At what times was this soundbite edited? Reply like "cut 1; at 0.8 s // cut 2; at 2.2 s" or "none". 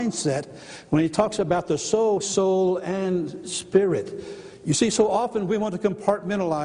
cut 1; at 2.2 s